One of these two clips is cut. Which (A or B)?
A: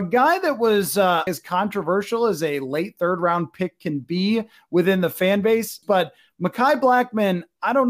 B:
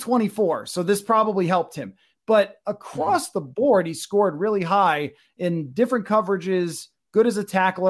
A